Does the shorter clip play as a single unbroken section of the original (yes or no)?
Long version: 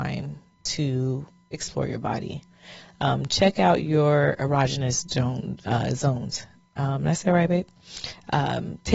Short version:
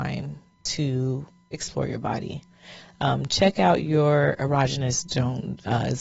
yes